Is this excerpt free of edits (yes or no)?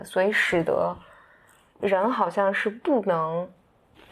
yes